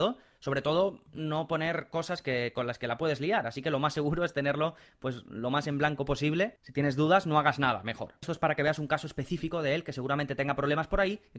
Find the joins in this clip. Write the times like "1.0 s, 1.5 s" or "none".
8.2 s